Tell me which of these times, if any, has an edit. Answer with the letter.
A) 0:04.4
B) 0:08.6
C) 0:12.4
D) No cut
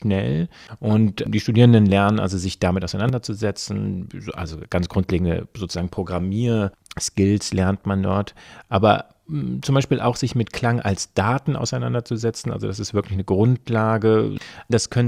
D